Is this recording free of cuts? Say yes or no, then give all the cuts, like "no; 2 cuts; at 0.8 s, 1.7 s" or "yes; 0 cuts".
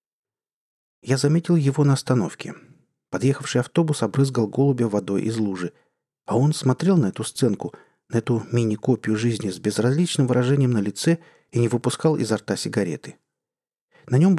yes; 0 cuts